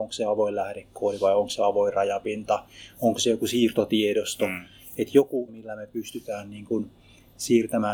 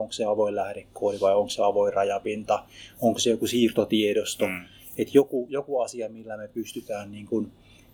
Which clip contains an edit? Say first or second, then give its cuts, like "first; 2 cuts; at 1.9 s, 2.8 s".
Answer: first; 1 cut; at 5.5 s